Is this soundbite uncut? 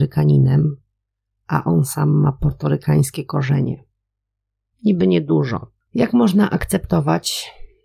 no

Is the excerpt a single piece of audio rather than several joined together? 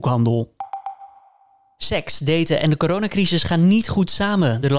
yes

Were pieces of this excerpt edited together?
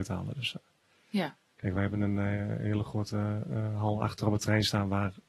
no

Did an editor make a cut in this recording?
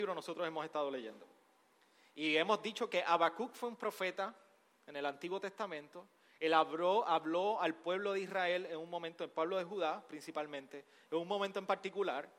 no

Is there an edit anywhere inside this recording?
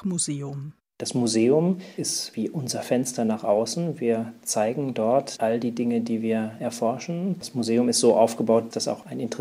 no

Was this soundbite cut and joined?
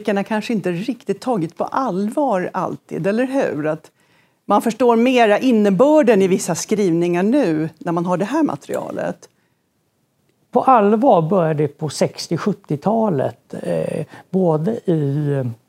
no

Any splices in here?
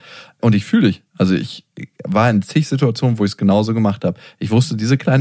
no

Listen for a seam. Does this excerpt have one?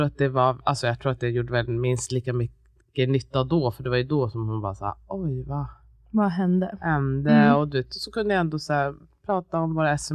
no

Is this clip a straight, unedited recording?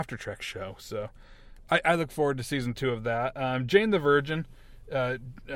yes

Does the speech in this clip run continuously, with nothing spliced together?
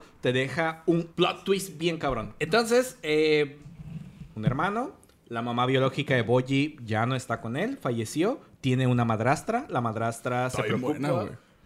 no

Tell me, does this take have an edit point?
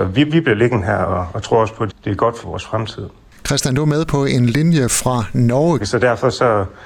yes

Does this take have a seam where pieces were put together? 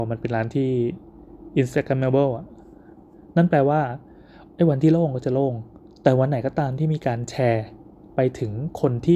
no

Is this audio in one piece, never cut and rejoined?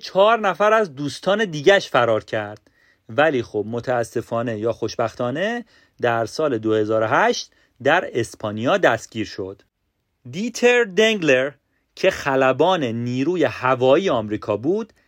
yes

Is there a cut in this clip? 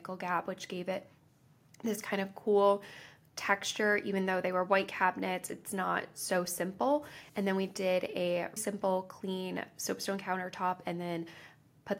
yes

